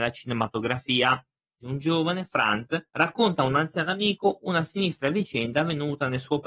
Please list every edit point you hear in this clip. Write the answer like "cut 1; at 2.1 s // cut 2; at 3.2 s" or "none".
cut 1; at 1.6 s // cut 2; at 2.9 s

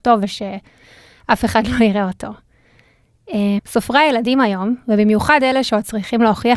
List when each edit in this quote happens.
cut 1; at 3.6 s

